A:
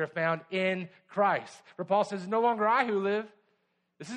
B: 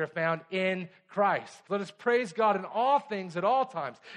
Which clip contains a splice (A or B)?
B